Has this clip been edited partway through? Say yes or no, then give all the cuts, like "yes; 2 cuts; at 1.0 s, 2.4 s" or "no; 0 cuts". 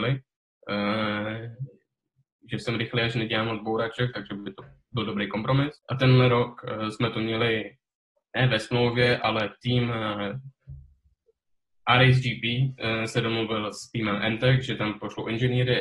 yes; 1 cut; at 5.8 s